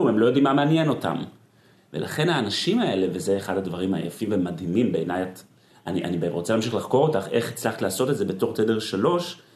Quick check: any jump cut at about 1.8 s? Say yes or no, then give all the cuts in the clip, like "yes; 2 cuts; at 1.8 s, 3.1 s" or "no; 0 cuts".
yes; 1 cut; at 1.8 s